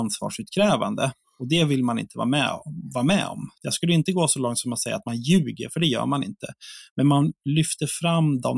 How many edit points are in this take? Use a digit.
1